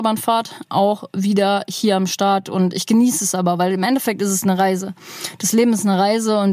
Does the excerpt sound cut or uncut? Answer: uncut